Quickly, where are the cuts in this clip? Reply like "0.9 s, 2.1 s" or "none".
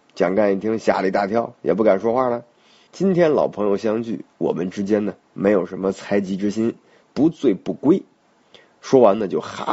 2.9 s, 7.0 s